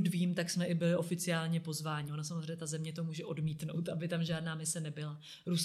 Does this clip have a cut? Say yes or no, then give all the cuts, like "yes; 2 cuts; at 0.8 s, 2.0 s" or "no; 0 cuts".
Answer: no; 0 cuts